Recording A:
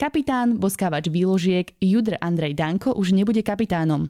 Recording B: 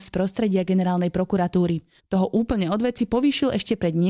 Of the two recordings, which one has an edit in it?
B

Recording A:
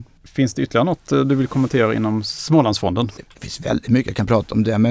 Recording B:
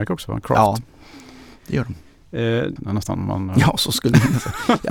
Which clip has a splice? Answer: B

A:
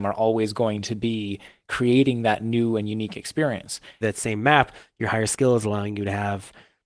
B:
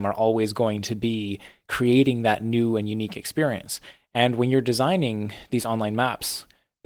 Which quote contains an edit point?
A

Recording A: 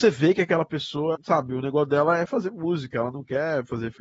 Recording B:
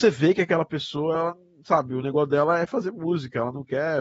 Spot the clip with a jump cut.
A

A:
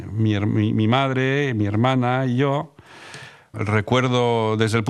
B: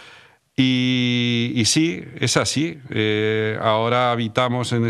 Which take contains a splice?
A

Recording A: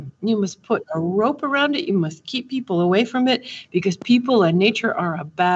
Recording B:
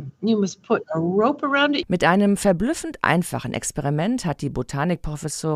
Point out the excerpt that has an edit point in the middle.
B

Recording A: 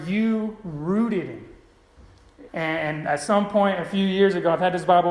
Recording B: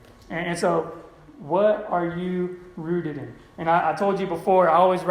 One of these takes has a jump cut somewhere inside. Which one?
A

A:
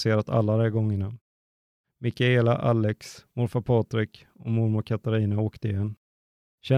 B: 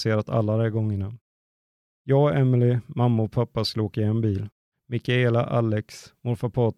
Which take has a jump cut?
A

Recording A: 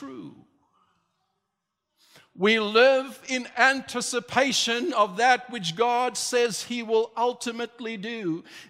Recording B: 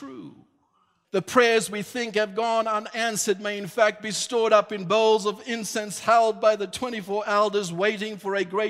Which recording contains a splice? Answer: B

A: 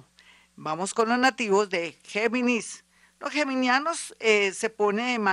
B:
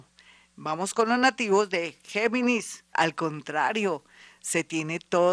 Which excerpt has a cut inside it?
B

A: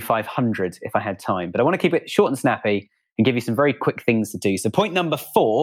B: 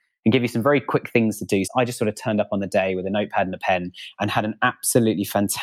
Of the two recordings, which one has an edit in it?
B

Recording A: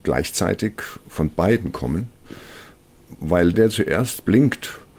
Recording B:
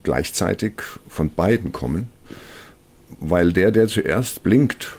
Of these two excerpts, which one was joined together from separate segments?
A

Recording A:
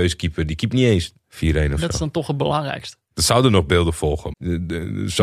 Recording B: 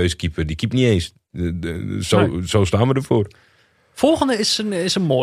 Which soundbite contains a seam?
A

